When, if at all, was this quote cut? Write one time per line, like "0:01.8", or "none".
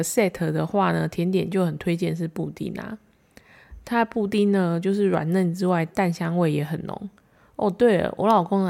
none